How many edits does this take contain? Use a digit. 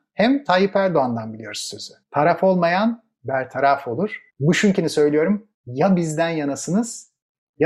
2